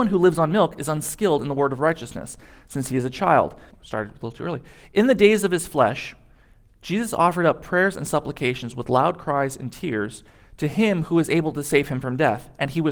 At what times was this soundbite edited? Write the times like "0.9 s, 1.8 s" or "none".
3.7 s